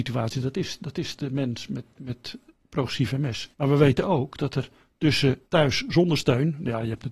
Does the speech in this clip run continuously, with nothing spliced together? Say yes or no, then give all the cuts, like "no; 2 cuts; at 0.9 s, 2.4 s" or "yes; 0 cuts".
no; 2 cuts; at 3.5 s, 5.4 s